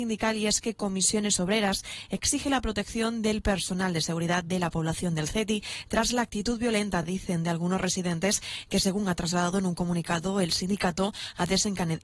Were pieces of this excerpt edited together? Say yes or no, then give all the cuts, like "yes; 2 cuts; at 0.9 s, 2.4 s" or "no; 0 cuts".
no; 0 cuts